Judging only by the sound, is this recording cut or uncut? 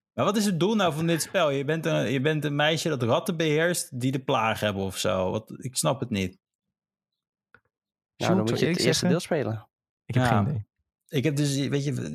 uncut